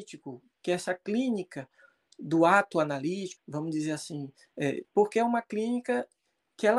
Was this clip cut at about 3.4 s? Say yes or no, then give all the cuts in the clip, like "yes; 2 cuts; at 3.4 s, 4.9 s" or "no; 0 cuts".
yes; 2 cuts; at 3.4 s, 4.8 s